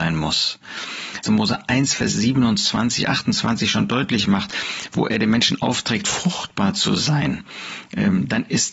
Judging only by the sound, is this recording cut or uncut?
cut